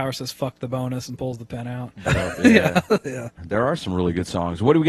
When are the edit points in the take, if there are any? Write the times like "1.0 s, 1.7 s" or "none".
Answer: 2.1 s, 3.4 s